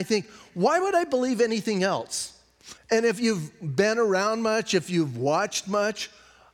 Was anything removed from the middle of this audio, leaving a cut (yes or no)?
yes